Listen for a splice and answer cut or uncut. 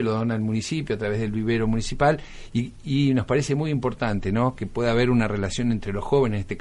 uncut